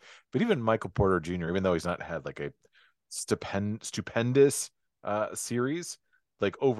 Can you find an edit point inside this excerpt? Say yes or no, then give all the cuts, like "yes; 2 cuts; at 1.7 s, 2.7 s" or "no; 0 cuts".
no; 0 cuts